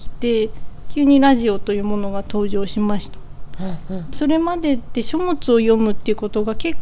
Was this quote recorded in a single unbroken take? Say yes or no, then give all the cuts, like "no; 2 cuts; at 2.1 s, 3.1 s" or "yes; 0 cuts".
no; 1 cut; at 4.1 s